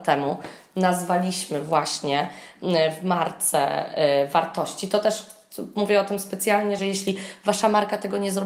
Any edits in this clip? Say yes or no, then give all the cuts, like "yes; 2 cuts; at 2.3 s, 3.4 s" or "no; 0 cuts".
yes; 1 cut; at 6.8 s